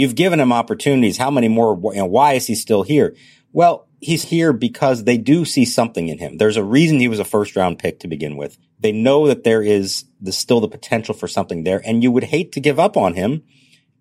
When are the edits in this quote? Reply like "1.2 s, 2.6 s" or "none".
4.2 s